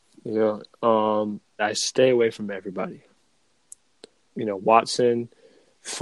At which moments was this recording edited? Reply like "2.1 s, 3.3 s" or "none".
1.6 s, 4.3 s